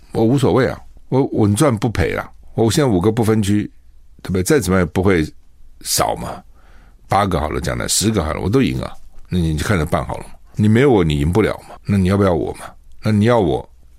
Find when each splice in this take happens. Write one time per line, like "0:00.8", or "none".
0:09.2